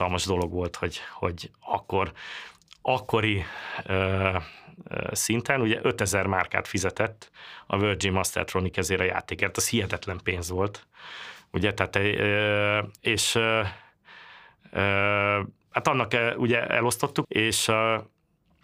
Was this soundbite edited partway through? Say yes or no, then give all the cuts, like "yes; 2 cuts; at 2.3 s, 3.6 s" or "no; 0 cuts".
yes; 2 cuts; at 13.0 s, 17.2 s